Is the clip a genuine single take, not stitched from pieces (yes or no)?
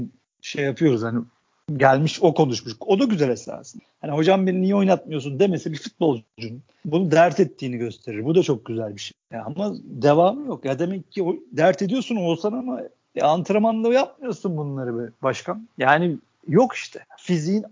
yes